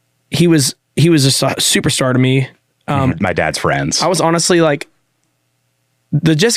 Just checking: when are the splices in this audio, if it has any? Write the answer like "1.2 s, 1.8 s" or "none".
3.1 s